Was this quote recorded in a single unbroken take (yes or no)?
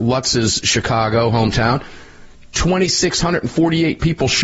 yes